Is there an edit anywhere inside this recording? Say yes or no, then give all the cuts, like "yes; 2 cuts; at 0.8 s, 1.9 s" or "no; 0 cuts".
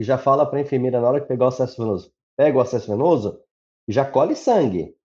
no; 0 cuts